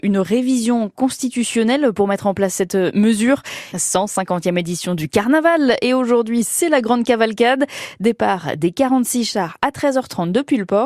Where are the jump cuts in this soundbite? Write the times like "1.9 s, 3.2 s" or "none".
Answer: 3.7 s